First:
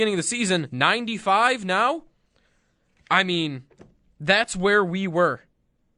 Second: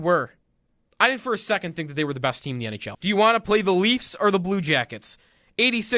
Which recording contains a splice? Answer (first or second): second